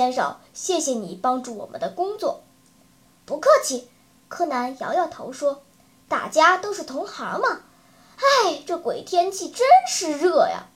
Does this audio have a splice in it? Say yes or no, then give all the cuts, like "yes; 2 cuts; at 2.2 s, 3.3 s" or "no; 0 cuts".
no; 0 cuts